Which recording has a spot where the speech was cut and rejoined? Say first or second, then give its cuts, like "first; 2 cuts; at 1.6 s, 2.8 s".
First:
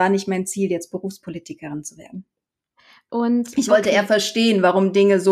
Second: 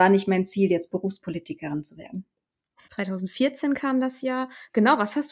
second; 1 cut; at 2.8 s